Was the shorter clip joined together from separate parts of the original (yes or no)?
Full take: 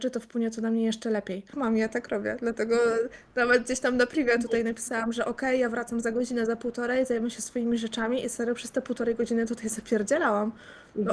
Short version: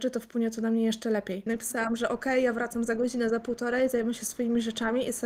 yes